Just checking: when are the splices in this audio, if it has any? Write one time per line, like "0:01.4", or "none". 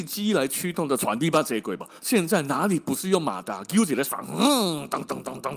0:02.0

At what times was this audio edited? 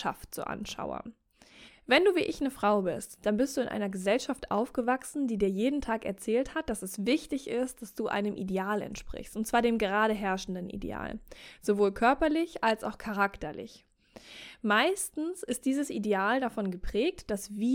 0:01.7

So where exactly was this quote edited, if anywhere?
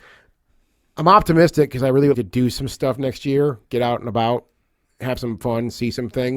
0:02.1

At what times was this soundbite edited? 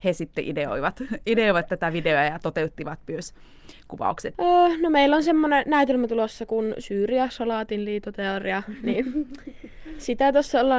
0:04.3

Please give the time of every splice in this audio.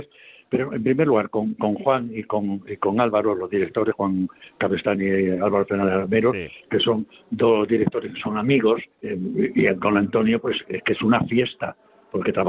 0:08.9
0:10.6

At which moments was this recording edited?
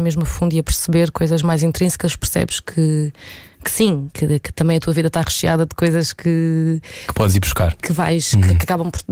none

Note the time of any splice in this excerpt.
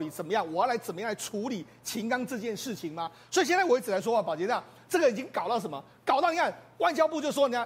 none

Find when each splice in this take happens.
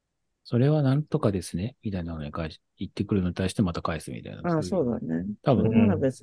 none

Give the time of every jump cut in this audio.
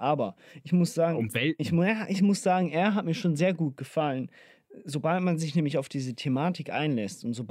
none

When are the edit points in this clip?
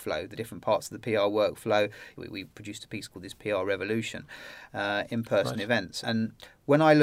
0:02.2
0:04.7
0:06.0

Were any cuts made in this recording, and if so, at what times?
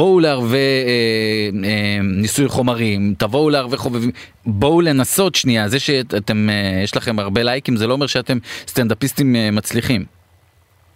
none

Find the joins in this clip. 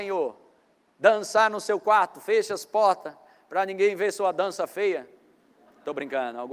none

